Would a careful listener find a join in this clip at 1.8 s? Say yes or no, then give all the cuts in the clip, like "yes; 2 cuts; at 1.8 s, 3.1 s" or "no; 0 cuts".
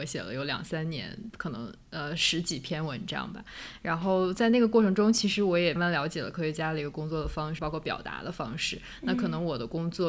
no; 2 cuts; at 5.8 s, 7.6 s